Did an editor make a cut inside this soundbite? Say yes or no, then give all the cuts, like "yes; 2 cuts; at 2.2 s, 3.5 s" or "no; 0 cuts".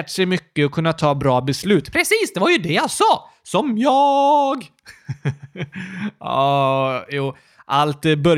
no; 0 cuts